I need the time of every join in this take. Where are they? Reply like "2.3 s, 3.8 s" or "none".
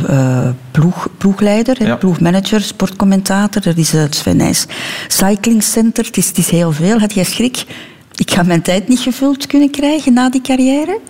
none